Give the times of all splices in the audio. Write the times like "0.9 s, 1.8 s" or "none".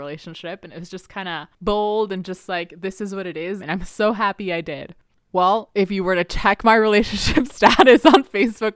3.6 s